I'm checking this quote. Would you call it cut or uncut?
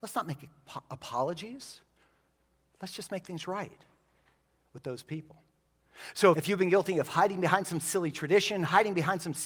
cut